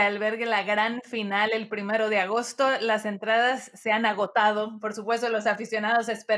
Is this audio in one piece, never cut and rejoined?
yes; 0 cuts

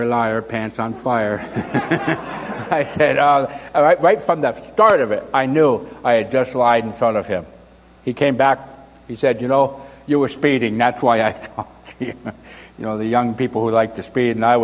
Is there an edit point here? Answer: no; 0 cuts

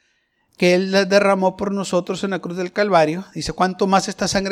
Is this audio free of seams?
yes; 0 cuts

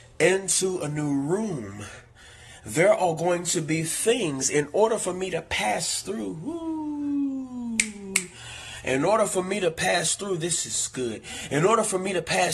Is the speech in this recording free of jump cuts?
yes; 0 cuts

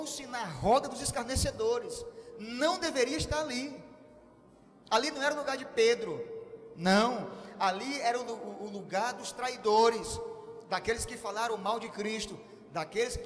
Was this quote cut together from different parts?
no; 0 cuts

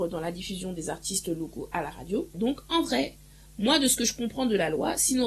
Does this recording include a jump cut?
yes; 1 cut; at 2.3 s

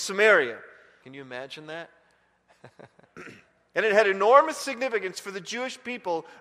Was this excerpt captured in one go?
no; 2 cuts; at 1.0 s, 3.0 s

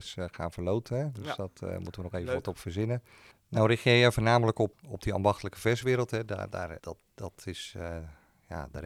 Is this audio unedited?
no; 2 cuts; at 4.7 s, 6.8 s

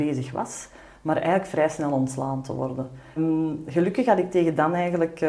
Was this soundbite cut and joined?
yes; 1 cut; at 3.2 s

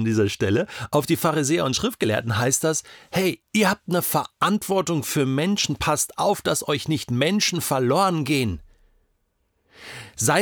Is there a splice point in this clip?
yes; 1 cut; at 3.4 s

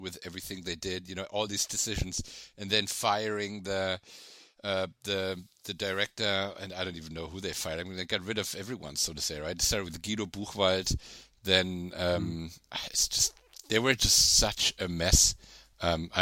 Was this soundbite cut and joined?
no; 0 cuts

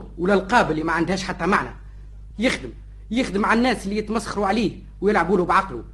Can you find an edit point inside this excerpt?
no; 0 cuts

